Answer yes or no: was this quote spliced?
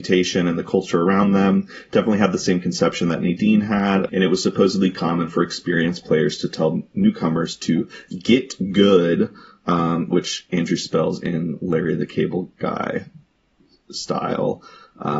yes